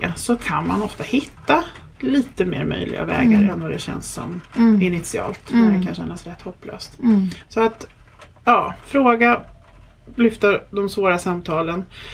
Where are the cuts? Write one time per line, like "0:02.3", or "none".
none